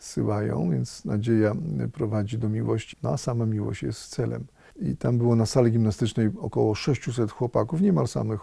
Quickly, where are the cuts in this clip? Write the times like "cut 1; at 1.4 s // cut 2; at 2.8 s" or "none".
cut 1; at 2.9 s // cut 2; at 4.7 s